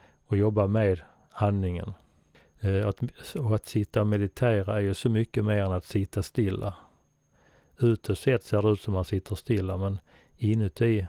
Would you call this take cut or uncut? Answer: uncut